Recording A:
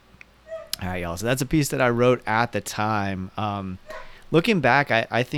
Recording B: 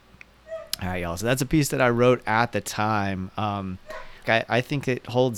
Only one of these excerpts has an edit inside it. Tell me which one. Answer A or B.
B